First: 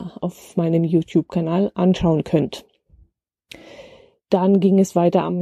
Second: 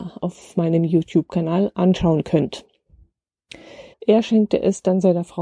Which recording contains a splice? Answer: second; 1 cut; at 3.9 s

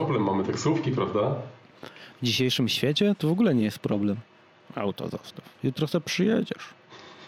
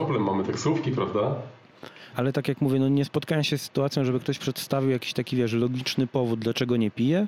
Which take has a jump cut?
second; 1 cut; at 2.1 s

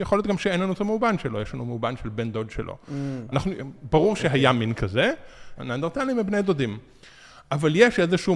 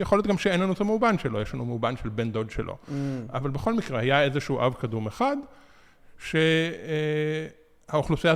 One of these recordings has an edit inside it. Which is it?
first; 2 cuts; at 3.3 s, 5.6 s

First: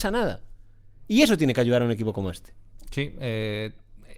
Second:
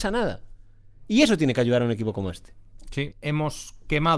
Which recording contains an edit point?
second; 1 cut; at 3.1 s

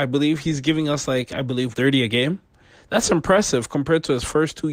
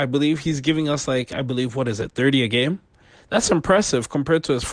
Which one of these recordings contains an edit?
first; 1 cut; at 1.7 s

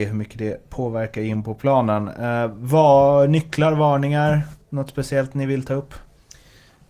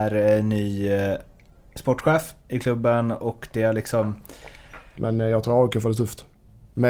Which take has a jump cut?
second; 1 cut; at 5.0 s

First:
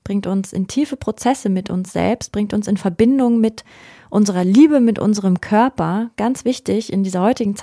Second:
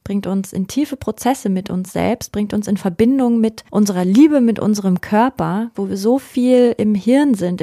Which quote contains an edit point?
second; 2 cuts; at 3.7 s, 5.7 s

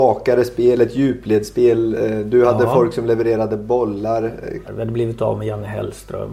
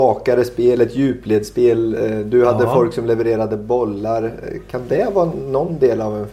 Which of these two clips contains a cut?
first; 1 cut; at 4.6 s

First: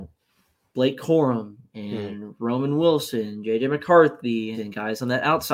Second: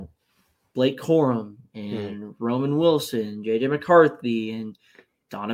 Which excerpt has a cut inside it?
first; 1 cut; at 4.5 s

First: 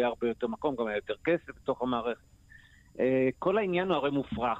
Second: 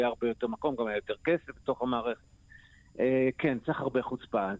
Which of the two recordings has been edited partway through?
first; 1 cut; at 3.3 s

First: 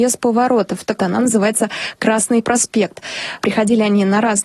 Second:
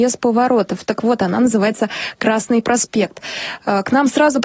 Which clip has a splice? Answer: first; 2 cuts; at 1.0 s, 3.4 s

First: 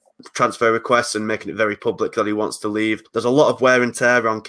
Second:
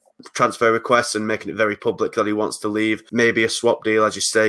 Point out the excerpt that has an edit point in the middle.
first; 1 cut; at 3.0 s

